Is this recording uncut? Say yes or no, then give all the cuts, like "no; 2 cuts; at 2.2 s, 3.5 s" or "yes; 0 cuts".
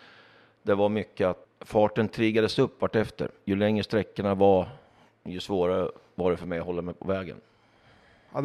no; 1 cut; at 1.4 s